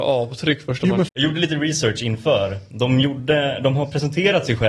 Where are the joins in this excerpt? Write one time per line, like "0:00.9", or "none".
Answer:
0:01.1